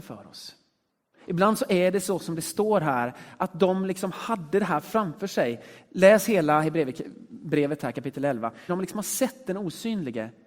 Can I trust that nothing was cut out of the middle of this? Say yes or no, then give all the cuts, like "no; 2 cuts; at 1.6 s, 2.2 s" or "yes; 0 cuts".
no; 1 cut; at 8.7 s